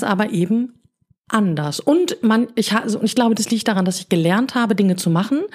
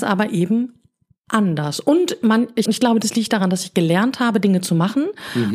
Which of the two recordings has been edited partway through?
second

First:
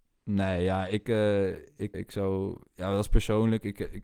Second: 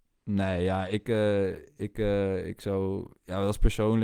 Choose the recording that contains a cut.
first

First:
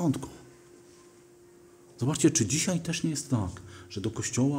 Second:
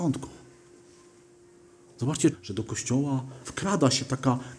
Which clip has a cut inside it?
second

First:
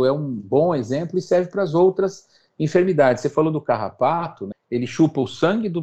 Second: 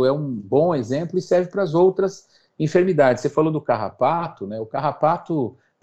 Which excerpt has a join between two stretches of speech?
first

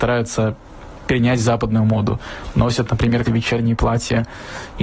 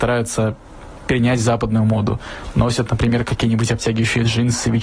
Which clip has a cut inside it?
first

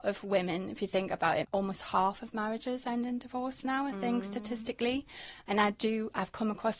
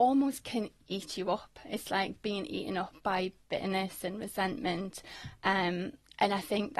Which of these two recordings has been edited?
first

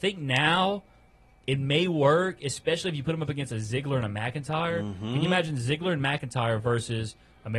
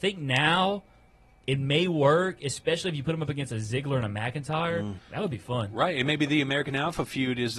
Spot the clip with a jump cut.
second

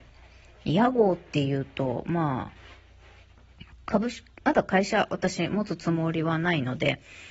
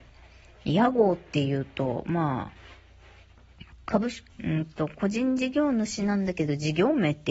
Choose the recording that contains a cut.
second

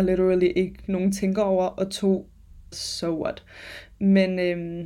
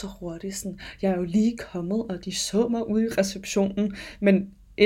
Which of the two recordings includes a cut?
first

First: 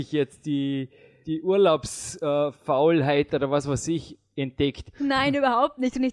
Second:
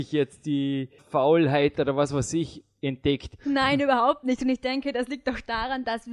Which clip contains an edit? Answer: second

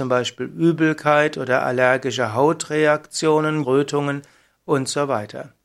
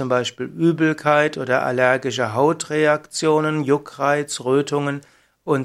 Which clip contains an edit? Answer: first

